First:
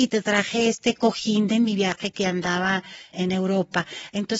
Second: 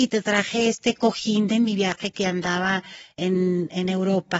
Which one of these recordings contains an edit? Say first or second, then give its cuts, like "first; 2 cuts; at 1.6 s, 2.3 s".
first; 1 cut; at 3.1 s